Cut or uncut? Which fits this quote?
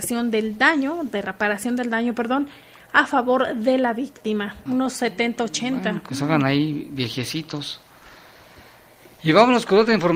cut